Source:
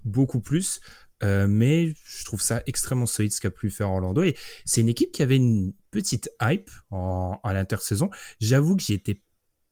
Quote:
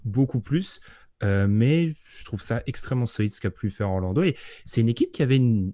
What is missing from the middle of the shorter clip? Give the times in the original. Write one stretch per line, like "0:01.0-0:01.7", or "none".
none